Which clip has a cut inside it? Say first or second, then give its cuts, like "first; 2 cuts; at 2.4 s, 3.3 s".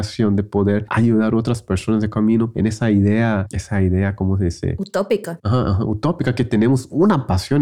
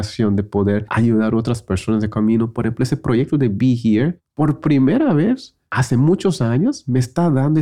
first; 1 cut; at 2.5 s